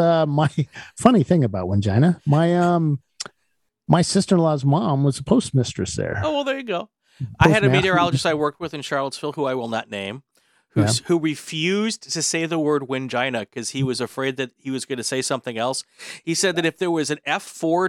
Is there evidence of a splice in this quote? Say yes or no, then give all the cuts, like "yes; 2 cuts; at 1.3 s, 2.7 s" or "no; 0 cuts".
no; 0 cuts